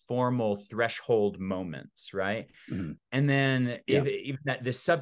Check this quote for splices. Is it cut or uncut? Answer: cut